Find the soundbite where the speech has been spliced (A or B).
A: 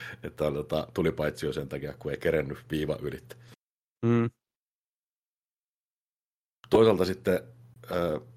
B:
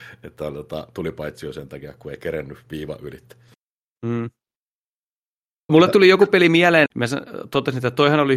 B